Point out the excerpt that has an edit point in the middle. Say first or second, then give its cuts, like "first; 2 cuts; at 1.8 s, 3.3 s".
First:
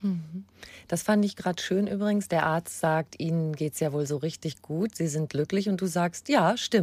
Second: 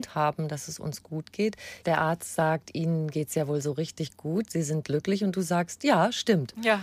second; 1 cut; at 1.8 s